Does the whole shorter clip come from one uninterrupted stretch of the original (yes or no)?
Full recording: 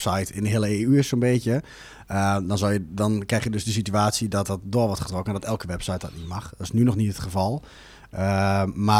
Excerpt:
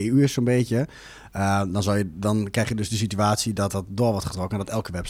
yes